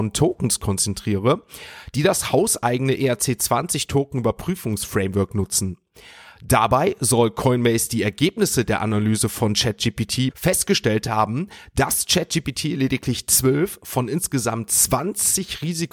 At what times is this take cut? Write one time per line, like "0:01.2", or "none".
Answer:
0:10.3